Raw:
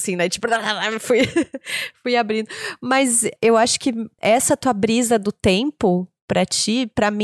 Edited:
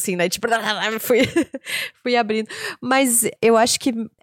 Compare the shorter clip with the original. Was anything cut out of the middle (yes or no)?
no